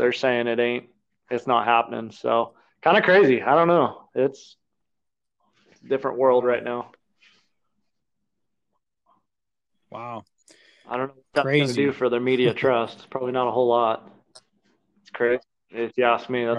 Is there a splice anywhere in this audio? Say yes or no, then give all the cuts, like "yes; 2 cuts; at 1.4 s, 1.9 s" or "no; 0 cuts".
no; 0 cuts